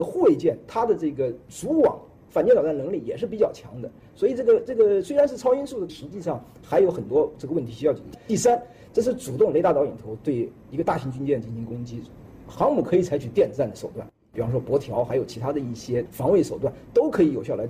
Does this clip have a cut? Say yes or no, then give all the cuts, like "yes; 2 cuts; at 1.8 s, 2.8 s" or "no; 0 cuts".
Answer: yes; 1 cut; at 5.9 s